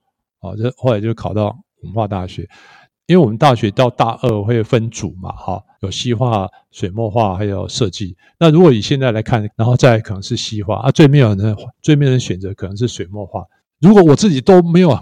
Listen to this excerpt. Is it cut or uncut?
cut